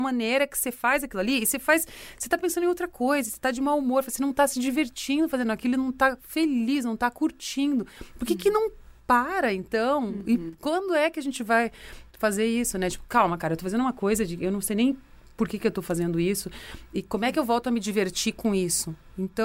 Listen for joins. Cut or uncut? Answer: uncut